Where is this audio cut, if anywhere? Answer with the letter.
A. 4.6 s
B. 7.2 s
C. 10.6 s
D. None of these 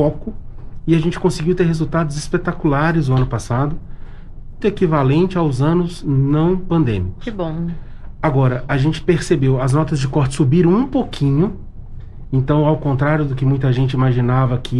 A